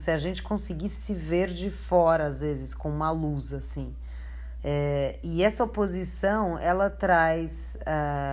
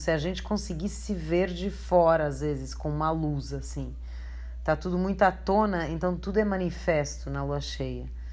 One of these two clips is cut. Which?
first; 1 cut; at 4.6 s

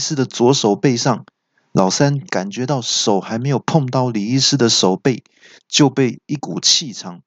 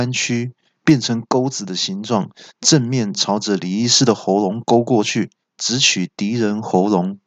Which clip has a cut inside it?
second; 1 cut; at 5.4 s

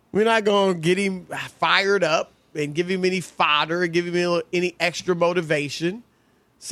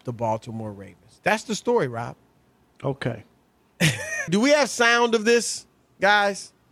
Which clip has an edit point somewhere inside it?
second; 2 cuts; at 2.7 s, 4.3 s

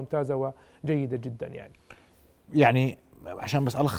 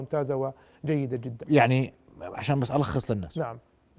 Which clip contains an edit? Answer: second; 1 cut; at 1.4 s

